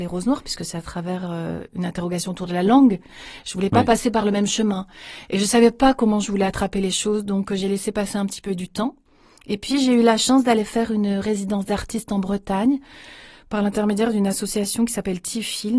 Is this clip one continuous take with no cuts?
yes; 0 cuts

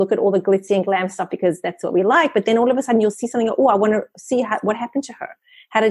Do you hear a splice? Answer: no; 0 cuts

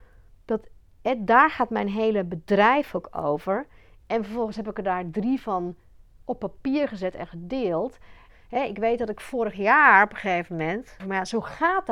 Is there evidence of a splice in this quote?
yes; 3 cuts; at 4.0 s, 8.3 s, 11.0 s

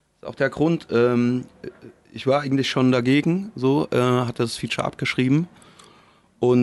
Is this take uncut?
yes; 0 cuts

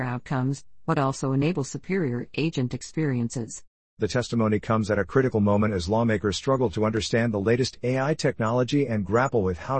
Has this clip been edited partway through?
yes; 1 cut; at 3.9 s

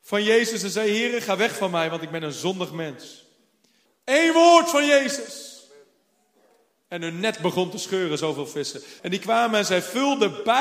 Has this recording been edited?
yes; 2 cuts; at 3.9 s, 9.0 s

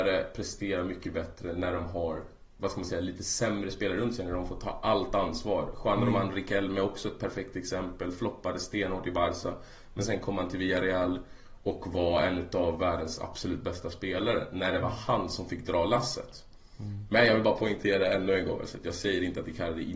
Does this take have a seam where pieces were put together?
no; 0 cuts

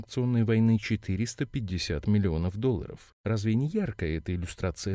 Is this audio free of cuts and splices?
no; 1 cut; at 3.1 s

